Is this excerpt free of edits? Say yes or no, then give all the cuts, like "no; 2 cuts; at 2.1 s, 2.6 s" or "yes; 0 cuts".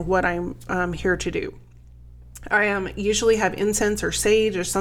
yes; 0 cuts